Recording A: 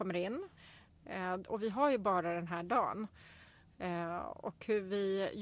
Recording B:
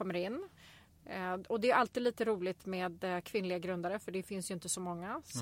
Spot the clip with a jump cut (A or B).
A